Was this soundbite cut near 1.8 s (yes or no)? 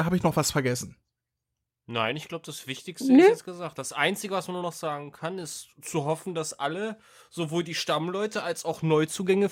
no